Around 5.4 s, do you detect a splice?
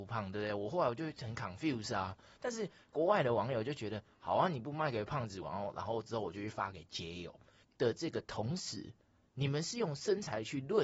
yes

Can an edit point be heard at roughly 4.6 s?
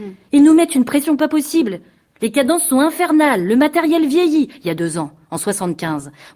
no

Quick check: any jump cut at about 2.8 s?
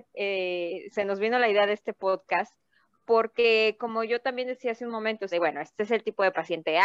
no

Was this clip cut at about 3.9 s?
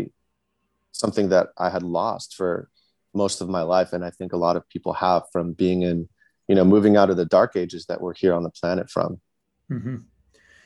no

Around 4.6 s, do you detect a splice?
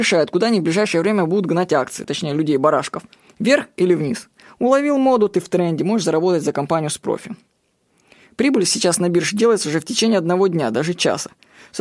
no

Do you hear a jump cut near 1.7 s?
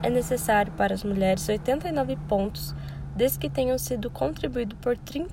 no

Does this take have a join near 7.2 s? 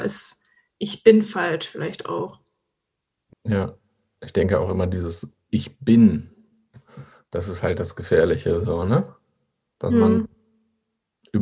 no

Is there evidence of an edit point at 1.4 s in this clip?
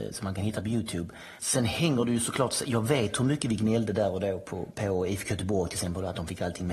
yes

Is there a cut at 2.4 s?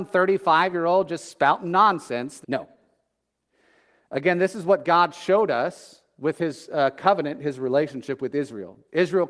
yes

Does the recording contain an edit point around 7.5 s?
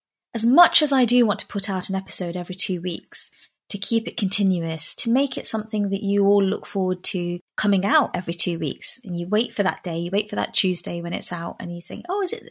yes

